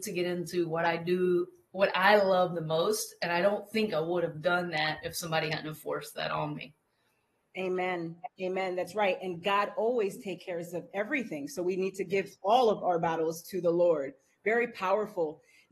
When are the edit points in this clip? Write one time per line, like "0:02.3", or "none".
none

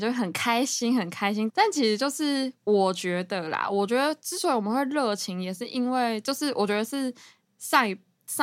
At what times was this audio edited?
0:01.5

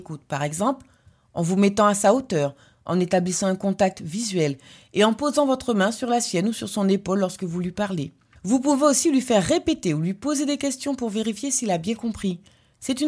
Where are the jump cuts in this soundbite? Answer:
none

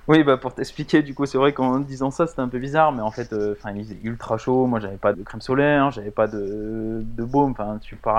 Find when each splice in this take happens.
0:05.1

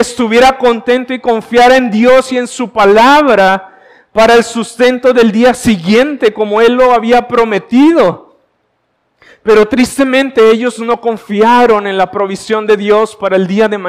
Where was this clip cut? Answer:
none

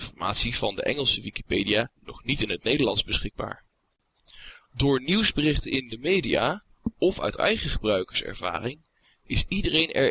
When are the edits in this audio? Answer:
none

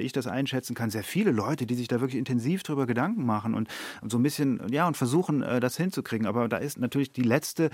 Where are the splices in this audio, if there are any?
none

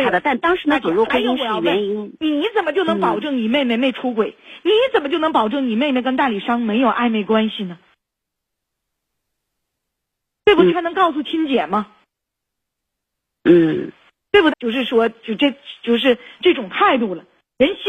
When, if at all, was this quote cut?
0:10.7
0:14.5

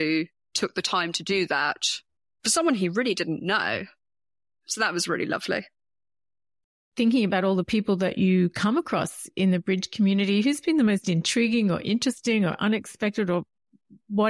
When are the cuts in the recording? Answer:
none

